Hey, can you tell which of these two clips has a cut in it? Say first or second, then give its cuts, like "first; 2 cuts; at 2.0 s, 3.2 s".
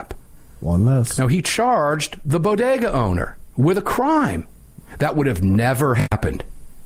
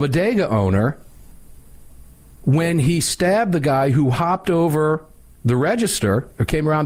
first; 1 cut; at 4.8 s